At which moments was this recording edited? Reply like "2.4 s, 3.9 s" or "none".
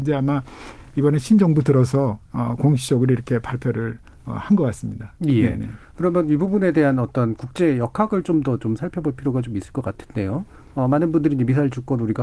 none